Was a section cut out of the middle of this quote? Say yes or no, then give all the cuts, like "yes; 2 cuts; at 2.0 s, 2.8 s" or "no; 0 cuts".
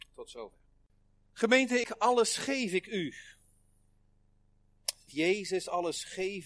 yes; 2 cuts; at 1.8 s, 5.1 s